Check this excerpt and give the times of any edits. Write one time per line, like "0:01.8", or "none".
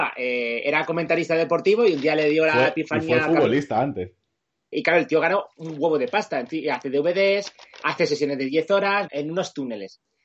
0:04.7
0:09.1